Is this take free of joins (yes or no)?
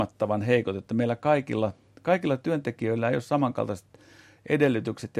yes